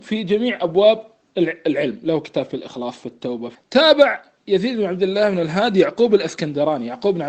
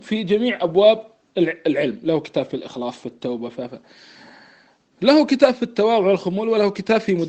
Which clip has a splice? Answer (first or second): first